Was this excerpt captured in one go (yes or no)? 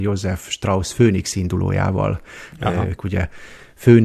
no